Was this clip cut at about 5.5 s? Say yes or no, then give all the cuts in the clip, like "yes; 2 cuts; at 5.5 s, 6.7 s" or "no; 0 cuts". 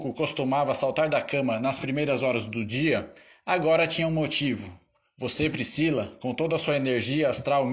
no; 0 cuts